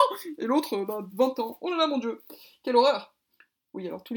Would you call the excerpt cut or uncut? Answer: uncut